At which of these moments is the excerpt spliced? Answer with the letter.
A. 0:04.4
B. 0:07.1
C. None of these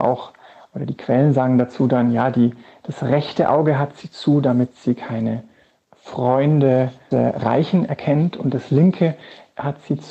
B